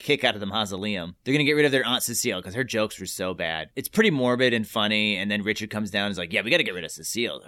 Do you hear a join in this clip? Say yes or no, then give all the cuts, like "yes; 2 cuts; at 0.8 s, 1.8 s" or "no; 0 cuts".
no; 0 cuts